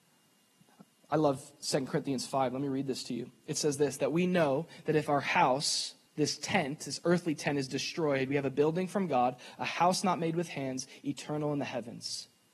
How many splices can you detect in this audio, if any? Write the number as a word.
zero